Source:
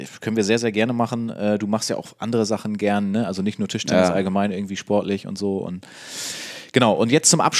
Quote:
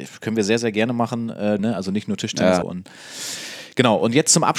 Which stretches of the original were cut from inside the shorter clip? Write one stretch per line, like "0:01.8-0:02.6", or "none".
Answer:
0:01.6-0:03.1
0:04.1-0:05.6